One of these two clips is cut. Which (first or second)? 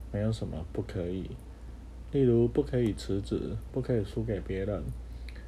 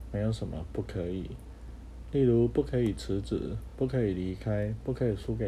first